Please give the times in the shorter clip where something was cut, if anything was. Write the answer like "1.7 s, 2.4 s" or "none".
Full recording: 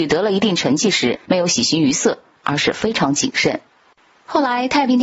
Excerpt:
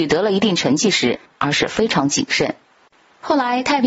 1.2 s